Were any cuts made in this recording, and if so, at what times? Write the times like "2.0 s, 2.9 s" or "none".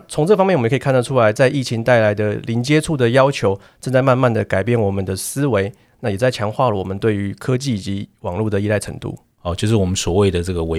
9.4 s